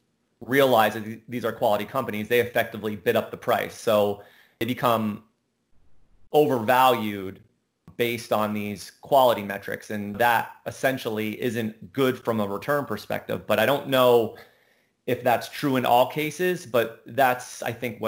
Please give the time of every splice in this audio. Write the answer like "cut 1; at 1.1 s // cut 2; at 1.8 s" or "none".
none